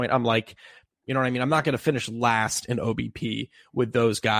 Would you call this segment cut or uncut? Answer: cut